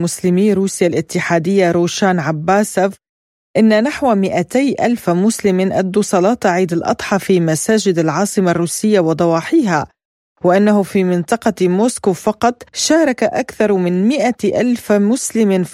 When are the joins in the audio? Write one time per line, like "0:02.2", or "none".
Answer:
0:12.7